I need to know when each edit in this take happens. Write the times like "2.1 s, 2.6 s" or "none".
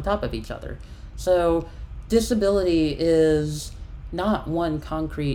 none

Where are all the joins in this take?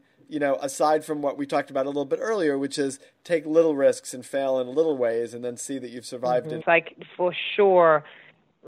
6.6 s

